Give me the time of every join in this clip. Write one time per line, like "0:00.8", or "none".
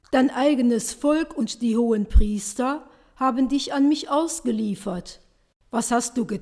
none